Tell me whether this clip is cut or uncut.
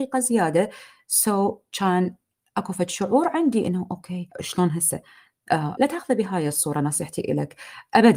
cut